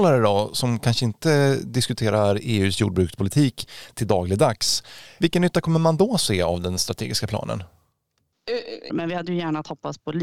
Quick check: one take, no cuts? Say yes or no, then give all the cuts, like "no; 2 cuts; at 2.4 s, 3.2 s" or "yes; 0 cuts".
no; 1 cut; at 8.9 s